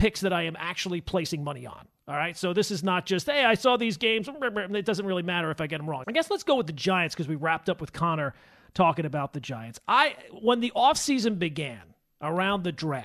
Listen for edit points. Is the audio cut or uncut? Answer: cut